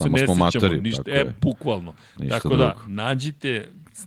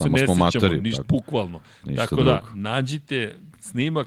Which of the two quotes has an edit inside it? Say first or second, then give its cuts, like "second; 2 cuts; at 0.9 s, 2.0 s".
second; 1 cut; at 1.0 s